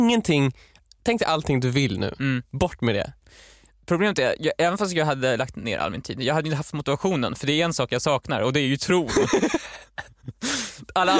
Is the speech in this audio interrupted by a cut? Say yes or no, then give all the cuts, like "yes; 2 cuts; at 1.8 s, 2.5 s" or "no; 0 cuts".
no; 0 cuts